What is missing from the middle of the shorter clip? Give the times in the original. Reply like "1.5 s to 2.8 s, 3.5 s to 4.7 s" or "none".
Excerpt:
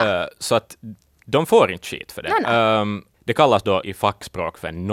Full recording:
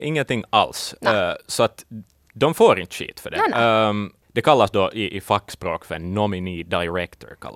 4.9 s to 5.1 s